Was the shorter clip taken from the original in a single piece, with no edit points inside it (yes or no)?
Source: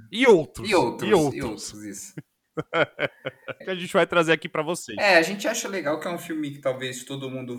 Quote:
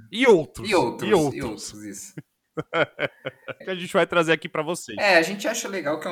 yes